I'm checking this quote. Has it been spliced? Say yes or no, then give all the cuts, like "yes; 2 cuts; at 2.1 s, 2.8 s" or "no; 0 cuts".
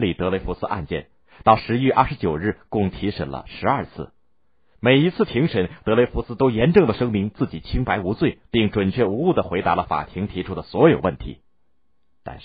no; 0 cuts